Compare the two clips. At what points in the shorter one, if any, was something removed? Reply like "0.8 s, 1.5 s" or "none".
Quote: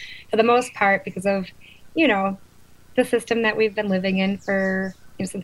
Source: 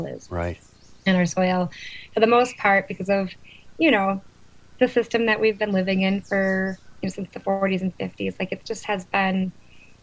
none